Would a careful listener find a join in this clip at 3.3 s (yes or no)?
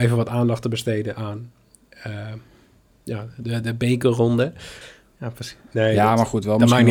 no